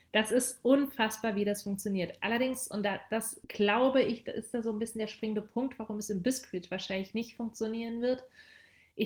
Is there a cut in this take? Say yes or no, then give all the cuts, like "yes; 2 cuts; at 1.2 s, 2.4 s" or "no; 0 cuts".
no; 0 cuts